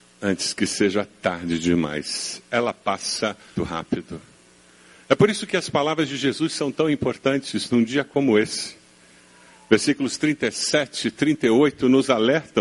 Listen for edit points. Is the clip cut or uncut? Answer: cut